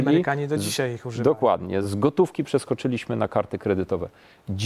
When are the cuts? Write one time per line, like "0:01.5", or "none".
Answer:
none